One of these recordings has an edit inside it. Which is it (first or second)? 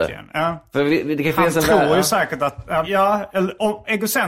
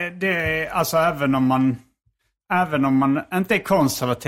first